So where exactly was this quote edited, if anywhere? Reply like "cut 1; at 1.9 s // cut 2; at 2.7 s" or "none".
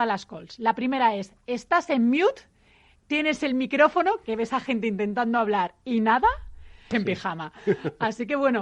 cut 1; at 6.9 s